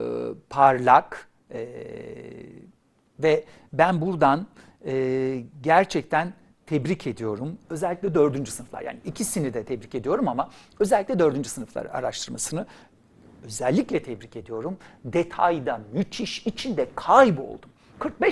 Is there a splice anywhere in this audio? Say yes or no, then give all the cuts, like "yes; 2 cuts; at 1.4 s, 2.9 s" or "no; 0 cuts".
no; 0 cuts